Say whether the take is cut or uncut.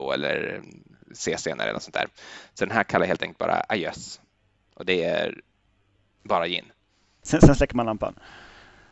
cut